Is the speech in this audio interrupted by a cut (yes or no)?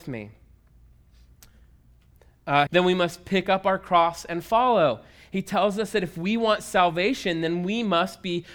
yes